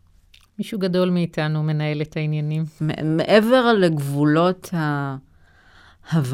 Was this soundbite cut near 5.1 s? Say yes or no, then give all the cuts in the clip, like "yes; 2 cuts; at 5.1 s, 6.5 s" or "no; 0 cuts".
no; 1 cut; at 2.8 s